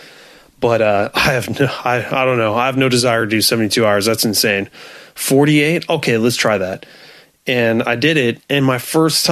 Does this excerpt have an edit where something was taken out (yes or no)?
no